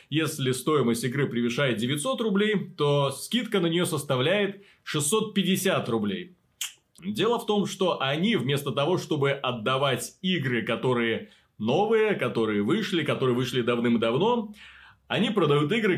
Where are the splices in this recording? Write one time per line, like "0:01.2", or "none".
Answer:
0:07.0